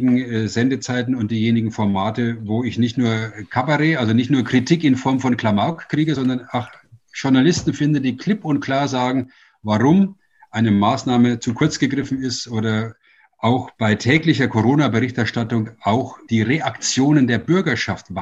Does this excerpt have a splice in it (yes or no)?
no